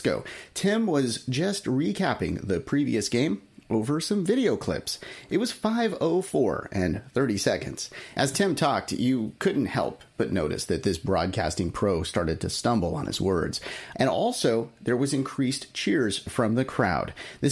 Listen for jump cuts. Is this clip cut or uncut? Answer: uncut